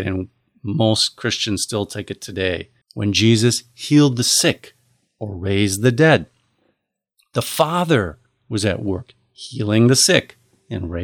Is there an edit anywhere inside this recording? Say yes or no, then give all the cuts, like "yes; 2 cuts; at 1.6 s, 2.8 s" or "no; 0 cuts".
yes; 1 cut; at 2.8 s